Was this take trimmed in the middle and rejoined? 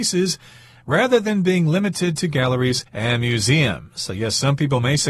yes; 1 cut; at 2.9 s

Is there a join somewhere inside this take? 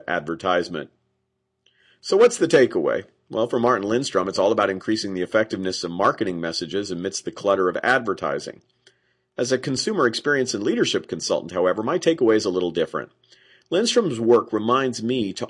no; 0 cuts

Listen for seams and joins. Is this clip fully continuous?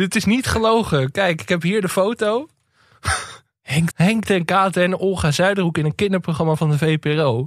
no; 1 cut; at 3.9 s

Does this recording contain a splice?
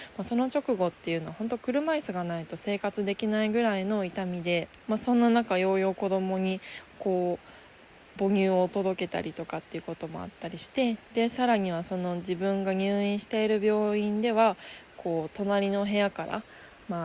yes; 1 cut; at 4.8 s

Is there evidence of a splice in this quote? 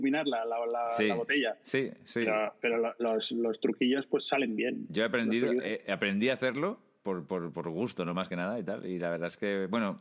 no; 0 cuts

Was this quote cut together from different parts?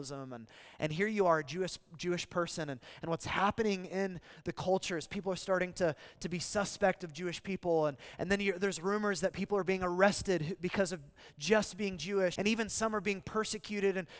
yes; 1 cut; at 12.3 s

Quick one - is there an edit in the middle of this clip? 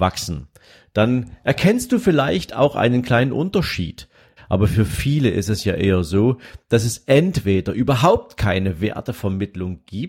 yes; 1 cut; at 4.4 s

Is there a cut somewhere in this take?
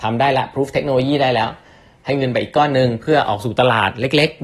no; 0 cuts

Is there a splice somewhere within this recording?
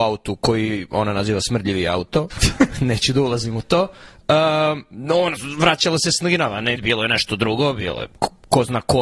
yes; 2 cuts; at 2.3 s, 6.8 s

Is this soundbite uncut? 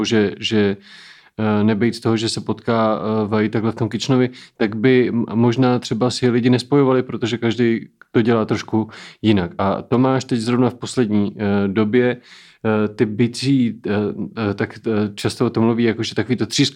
yes; 0 cuts

